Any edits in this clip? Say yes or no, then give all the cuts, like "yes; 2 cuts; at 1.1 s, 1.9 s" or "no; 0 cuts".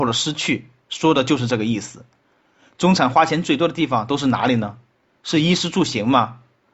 no; 0 cuts